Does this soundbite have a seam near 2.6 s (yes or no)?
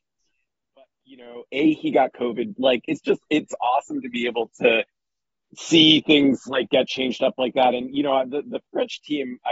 yes